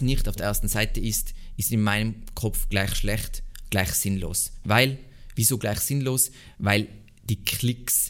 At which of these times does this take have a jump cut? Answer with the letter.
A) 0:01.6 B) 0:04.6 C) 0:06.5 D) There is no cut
D